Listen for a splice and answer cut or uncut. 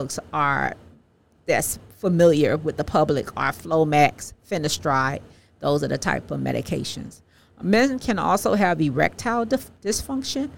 uncut